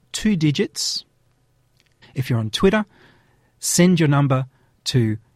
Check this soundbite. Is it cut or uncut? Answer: cut